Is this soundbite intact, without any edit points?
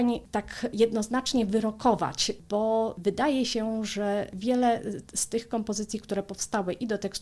yes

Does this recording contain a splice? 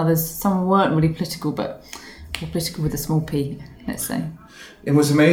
no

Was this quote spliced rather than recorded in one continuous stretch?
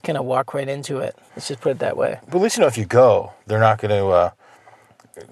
yes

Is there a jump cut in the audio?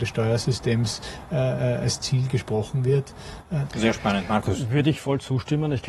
yes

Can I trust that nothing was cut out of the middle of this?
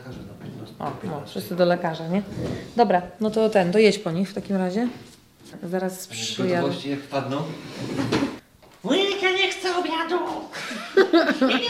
yes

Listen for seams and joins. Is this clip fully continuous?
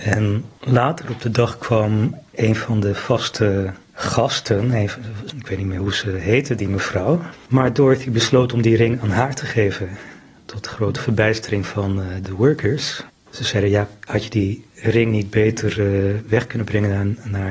no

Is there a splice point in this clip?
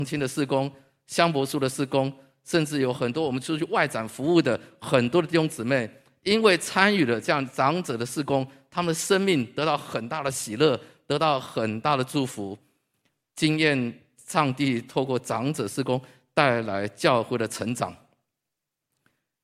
no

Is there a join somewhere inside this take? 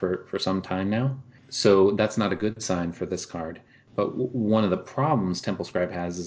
no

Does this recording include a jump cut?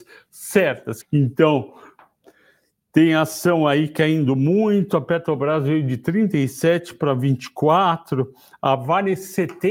yes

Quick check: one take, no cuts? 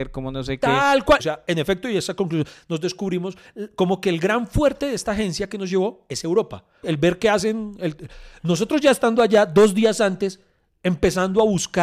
no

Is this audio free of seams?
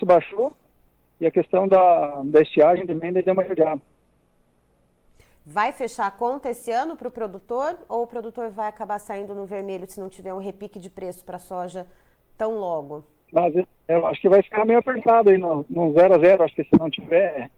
no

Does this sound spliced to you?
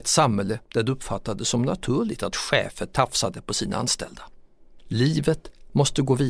no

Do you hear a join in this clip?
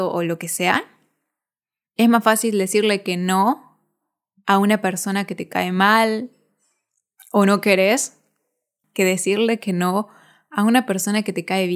no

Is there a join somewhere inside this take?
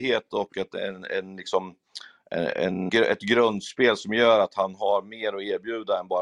yes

